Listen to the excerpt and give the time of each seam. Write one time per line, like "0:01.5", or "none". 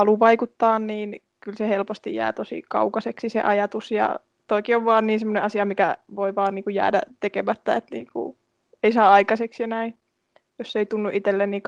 none